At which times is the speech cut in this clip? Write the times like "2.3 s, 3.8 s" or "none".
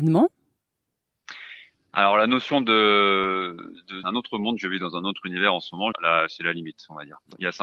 4.0 s, 5.9 s